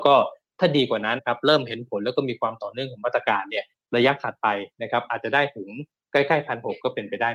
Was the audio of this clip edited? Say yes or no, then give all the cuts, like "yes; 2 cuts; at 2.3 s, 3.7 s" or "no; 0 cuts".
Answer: yes; 1 cut; at 1.2 s